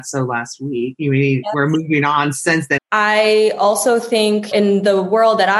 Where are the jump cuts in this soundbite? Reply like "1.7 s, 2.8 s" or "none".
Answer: 2.8 s, 4.5 s